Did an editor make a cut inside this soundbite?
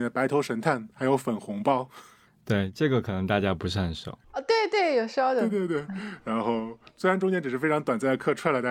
yes; 2 cuts; at 2.3 s, 4.2 s

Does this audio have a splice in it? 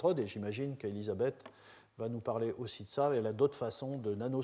no; 0 cuts

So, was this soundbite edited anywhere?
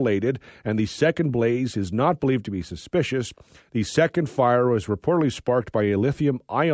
no; 0 cuts

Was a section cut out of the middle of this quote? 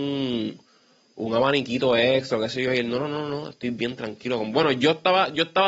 no; 0 cuts

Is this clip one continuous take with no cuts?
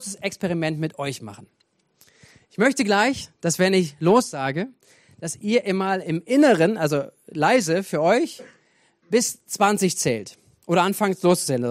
yes; 0 cuts

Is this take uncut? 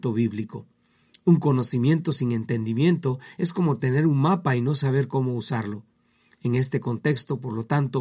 yes; 0 cuts

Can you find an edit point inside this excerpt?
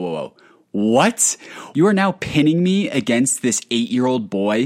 yes; 1 cut; at 1.7 s

